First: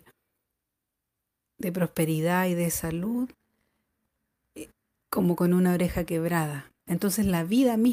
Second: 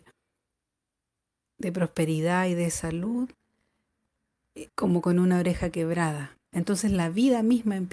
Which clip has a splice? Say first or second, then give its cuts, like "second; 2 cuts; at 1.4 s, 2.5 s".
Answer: second; 1 cut; at 4.7 s